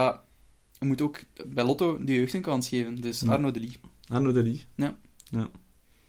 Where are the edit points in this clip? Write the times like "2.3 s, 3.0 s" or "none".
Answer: none